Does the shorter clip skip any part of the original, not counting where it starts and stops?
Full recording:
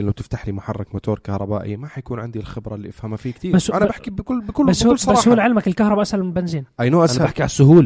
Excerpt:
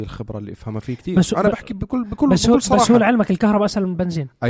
no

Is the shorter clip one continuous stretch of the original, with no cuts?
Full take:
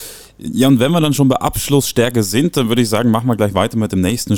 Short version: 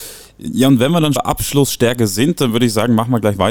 no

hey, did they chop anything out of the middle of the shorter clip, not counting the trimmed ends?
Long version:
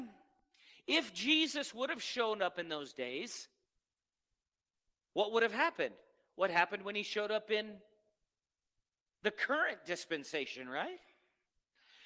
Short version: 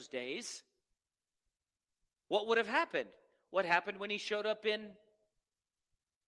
no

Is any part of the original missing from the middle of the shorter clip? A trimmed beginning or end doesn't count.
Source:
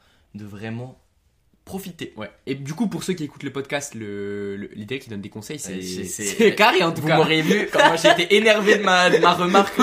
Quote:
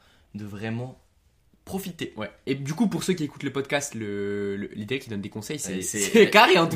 yes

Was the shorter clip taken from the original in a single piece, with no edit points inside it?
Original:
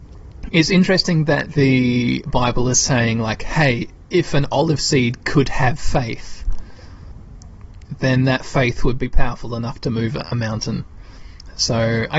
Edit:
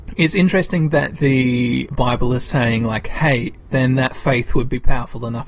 no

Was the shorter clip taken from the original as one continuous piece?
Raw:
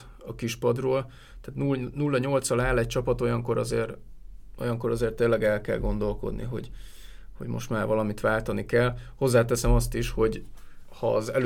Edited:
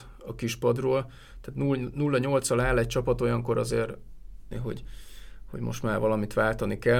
no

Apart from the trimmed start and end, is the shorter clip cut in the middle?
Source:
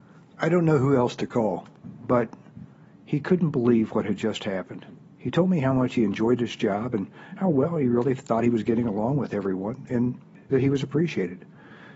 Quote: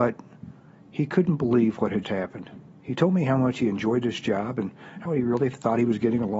yes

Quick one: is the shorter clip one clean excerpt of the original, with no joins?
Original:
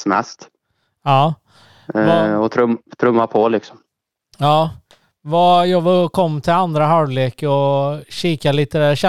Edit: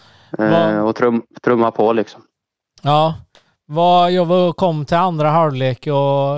yes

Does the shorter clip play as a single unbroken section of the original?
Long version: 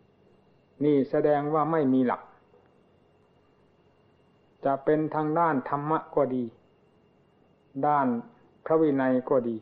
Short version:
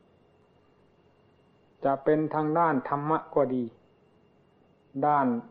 yes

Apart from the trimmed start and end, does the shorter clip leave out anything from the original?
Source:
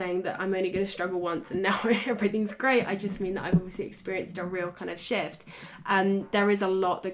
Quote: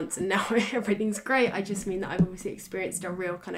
no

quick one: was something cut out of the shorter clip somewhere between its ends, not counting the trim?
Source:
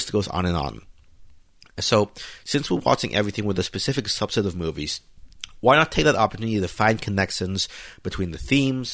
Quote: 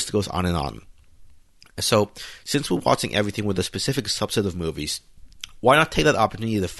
no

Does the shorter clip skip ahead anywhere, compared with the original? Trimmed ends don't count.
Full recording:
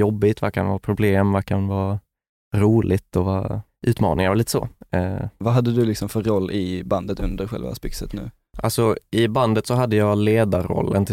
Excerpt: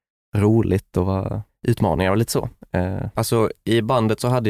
yes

